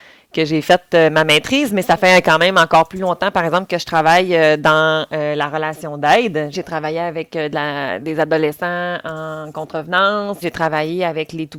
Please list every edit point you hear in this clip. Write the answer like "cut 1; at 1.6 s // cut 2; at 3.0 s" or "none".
cut 1; at 6.5 s // cut 2; at 8.0 s // cut 3; at 10.4 s